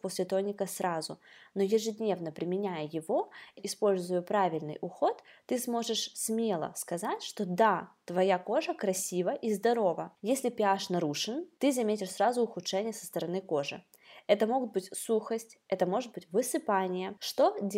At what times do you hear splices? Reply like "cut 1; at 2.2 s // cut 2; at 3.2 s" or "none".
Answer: cut 1; at 3.6 s // cut 2; at 10.2 s